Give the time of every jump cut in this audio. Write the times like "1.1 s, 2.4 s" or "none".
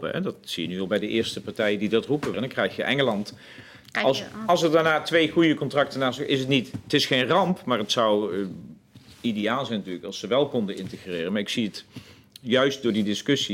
2.3 s

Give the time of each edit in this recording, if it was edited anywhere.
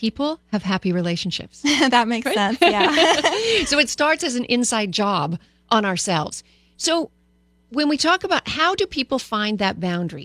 none

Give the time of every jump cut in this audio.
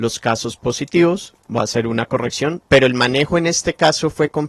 2.7 s

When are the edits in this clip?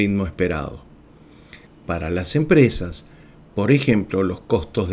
1.7 s

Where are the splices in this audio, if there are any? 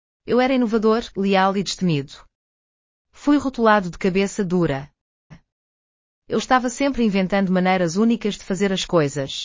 1.1 s, 5.3 s

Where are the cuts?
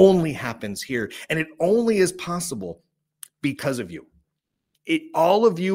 none

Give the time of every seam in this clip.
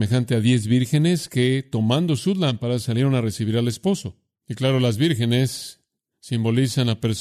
none

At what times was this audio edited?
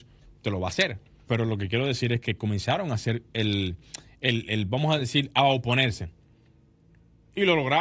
1.3 s

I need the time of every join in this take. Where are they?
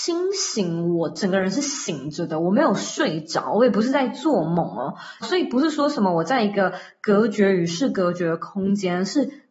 5.2 s

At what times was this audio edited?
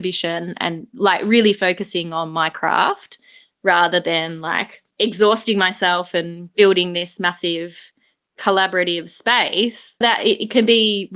4.9 s, 10.0 s

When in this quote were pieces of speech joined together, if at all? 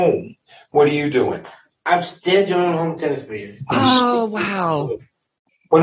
none

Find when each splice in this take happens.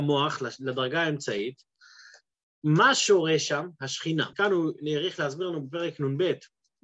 4.3 s

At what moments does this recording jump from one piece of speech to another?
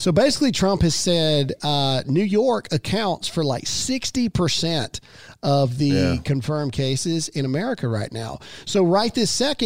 none

